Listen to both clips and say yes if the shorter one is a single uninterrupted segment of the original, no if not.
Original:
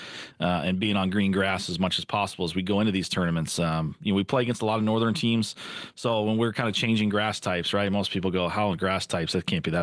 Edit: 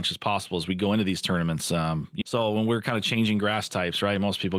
no